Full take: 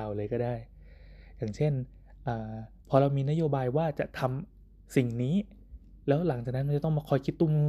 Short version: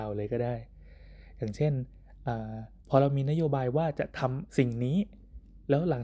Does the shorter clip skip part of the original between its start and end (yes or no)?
yes